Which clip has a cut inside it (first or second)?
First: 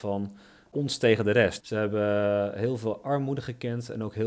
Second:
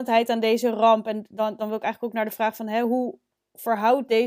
first